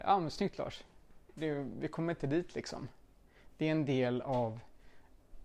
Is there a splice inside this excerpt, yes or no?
yes